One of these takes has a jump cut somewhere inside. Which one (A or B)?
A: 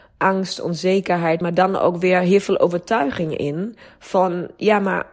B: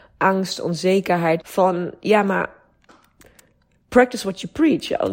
B